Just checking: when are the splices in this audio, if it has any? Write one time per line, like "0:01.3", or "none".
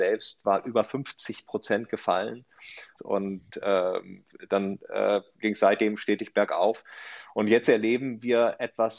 0:03.0